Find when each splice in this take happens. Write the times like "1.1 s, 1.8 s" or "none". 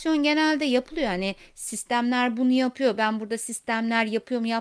none